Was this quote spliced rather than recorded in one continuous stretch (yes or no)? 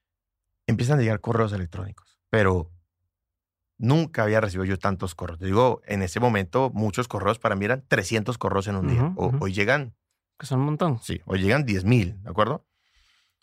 yes